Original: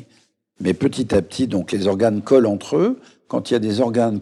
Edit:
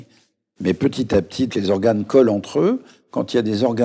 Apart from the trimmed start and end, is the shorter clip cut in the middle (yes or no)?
yes